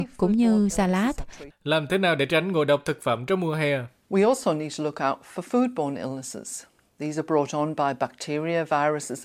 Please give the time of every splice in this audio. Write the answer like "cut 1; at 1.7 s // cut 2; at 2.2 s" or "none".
cut 1; at 1.5 s